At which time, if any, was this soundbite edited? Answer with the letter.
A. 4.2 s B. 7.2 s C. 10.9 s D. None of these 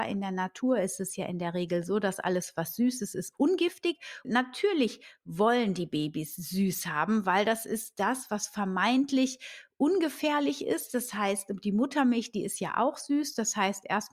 A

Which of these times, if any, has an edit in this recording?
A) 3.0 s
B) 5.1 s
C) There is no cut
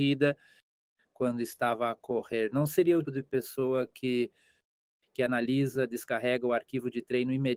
A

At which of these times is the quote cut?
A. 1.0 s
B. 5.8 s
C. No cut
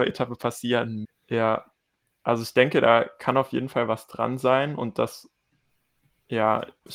A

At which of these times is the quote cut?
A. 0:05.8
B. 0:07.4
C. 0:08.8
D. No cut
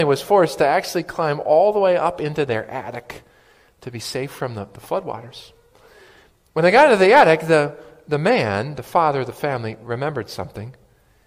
D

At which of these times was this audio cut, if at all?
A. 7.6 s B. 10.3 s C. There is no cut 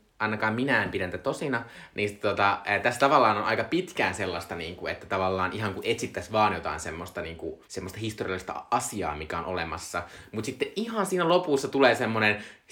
A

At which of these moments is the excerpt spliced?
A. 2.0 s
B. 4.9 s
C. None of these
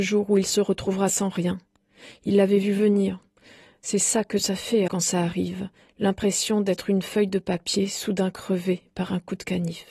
B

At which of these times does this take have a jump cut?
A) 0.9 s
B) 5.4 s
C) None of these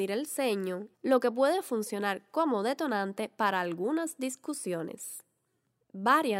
A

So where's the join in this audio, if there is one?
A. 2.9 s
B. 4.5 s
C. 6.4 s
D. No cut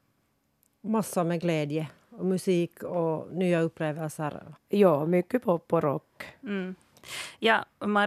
B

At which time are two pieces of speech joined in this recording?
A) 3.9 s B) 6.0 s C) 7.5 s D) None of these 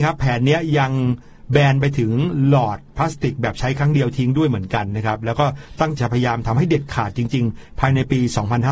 B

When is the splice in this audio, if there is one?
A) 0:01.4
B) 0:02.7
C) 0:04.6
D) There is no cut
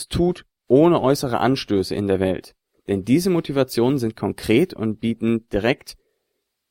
B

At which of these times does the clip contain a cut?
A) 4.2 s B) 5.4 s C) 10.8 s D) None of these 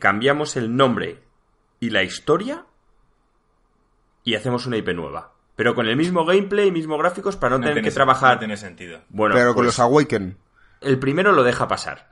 C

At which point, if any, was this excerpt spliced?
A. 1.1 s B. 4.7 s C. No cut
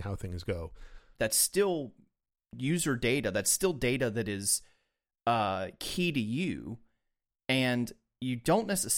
A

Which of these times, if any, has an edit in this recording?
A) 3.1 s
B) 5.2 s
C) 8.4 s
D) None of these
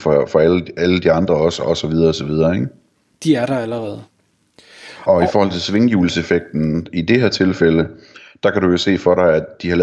A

